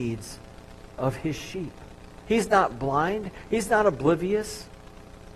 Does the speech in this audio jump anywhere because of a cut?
yes; 1 cut; at 2.2 s

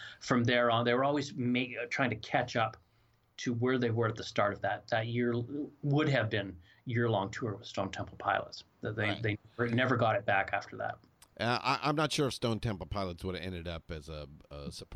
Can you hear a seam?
no; 0 cuts

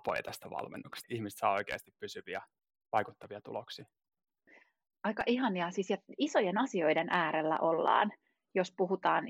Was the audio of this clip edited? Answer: yes; 1 cut; at 1.0 s

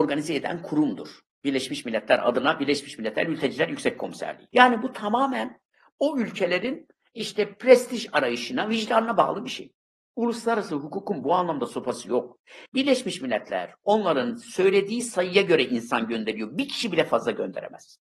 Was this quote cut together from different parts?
yes; 2 cuts; at 4.5 s, 12.7 s

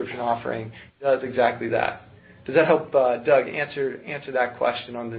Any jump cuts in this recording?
no; 0 cuts

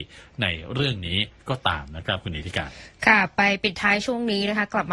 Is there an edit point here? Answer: no; 0 cuts

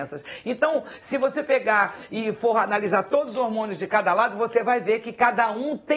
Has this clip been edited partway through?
no; 0 cuts

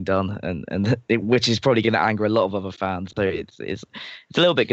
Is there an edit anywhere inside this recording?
yes; 1 cut; at 3.1 s

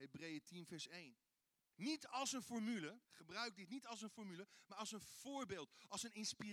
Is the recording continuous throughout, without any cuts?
no; 2 cuts; at 1.7 s, 3.1 s

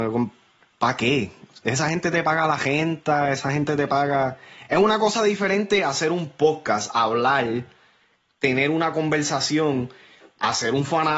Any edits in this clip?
no; 0 cuts

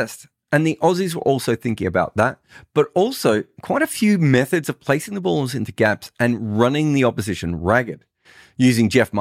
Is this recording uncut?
yes; 0 cuts

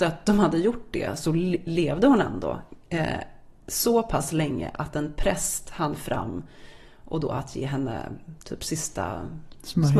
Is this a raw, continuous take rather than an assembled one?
yes; 0 cuts

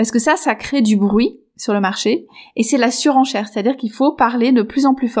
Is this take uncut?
yes; 0 cuts

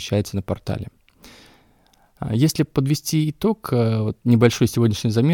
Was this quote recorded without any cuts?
yes; 0 cuts

